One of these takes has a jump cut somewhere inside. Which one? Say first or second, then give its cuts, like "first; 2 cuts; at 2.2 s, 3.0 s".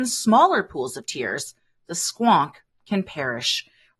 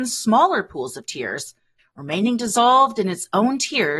second; 1 cut; at 1.8 s